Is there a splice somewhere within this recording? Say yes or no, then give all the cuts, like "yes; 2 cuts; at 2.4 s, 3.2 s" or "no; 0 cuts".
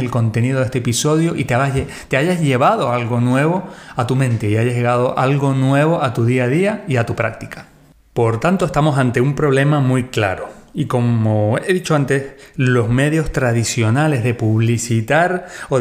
no; 0 cuts